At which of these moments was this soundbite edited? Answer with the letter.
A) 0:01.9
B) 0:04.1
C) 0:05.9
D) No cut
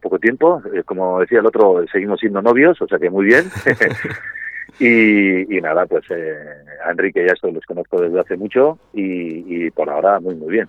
D